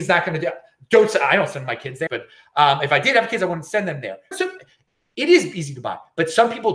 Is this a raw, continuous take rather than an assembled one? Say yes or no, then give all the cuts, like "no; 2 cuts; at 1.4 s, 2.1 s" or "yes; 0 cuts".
no; 2 cuts; at 2.1 s, 4.3 s